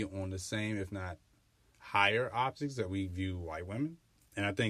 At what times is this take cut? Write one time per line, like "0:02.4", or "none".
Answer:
none